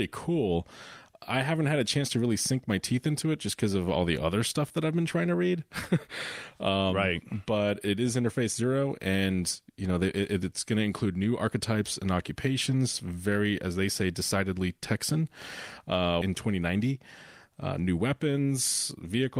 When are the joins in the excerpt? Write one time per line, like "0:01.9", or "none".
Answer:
0:16.2